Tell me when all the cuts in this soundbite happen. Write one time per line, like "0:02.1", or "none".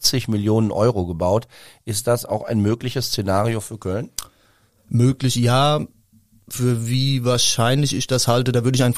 none